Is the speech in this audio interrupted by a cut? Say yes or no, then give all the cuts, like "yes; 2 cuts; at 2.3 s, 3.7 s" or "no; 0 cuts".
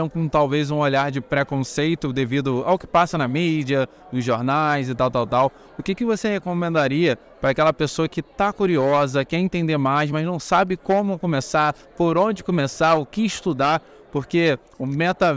no; 0 cuts